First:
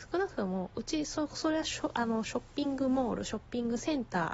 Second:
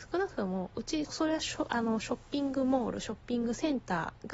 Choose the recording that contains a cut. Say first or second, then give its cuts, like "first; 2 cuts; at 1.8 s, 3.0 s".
second; 1 cut; at 1.0 s